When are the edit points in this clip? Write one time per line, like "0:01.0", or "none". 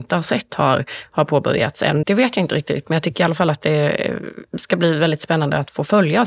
0:02.0